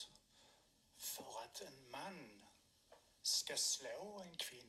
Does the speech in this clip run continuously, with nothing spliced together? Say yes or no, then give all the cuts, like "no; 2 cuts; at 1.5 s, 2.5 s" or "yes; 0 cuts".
yes; 0 cuts